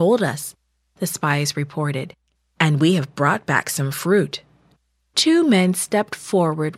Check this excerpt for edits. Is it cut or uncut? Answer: uncut